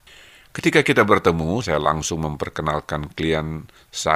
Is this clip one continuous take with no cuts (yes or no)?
no